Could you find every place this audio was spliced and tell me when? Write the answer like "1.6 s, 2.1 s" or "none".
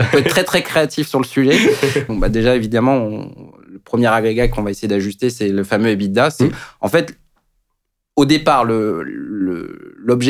2.1 s